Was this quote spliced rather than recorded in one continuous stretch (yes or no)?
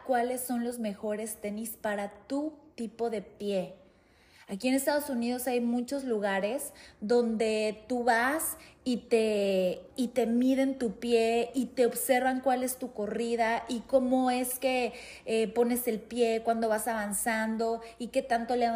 no